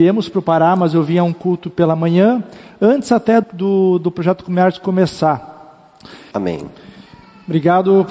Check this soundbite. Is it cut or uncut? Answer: cut